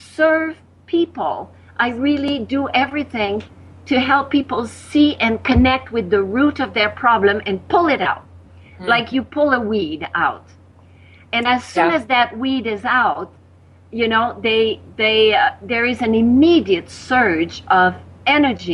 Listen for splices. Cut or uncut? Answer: uncut